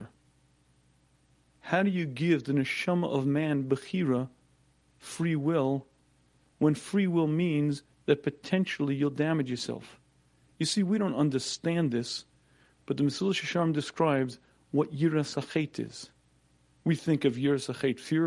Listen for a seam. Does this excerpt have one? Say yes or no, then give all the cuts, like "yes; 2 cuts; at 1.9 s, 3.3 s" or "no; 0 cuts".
no; 0 cuts